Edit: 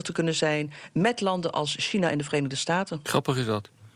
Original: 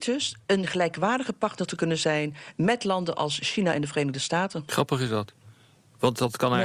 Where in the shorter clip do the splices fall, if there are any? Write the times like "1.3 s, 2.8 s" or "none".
none